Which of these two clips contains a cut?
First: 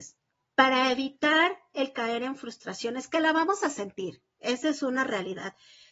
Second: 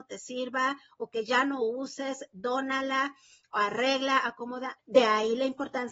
second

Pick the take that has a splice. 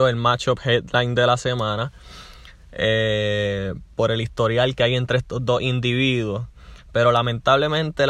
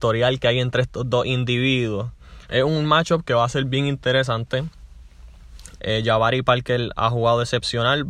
second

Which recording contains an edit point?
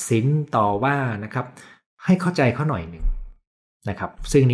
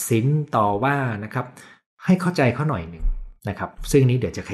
second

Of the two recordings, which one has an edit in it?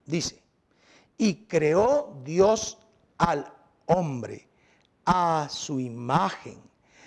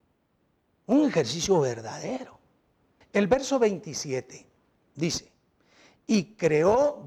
second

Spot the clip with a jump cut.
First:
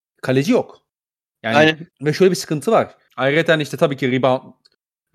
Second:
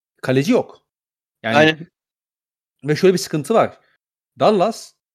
first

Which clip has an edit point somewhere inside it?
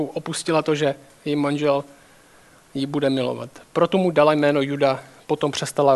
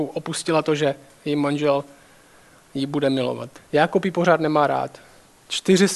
second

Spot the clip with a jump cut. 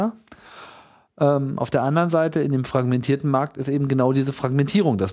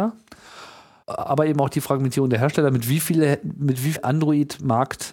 second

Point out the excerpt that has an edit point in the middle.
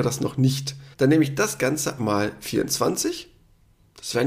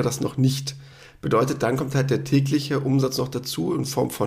first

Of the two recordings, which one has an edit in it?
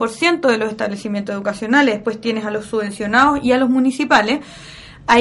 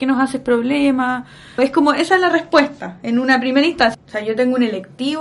second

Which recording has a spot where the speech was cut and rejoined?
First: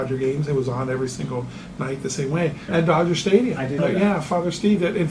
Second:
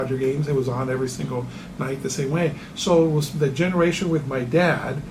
first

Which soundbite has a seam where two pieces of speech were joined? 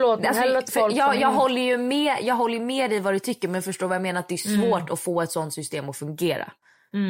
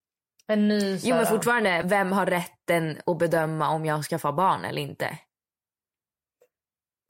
second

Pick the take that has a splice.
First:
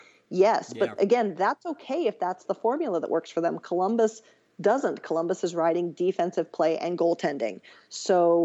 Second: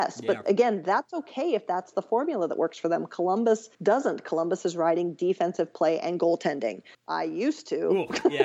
second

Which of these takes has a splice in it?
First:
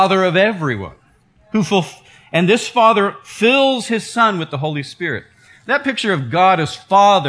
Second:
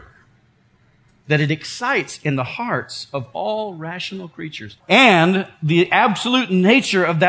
second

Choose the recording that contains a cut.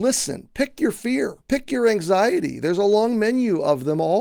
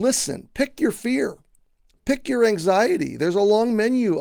first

